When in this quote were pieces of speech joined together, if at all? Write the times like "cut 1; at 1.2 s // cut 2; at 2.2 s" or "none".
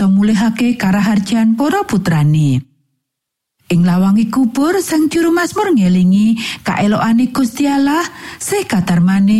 none